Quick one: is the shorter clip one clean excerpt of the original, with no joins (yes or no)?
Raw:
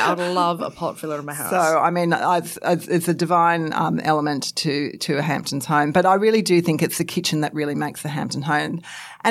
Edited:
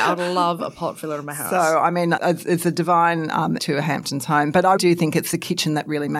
no